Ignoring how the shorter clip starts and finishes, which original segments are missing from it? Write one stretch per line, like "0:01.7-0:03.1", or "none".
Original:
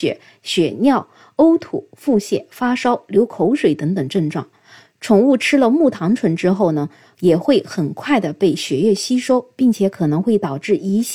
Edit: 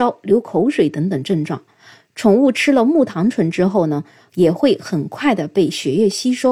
none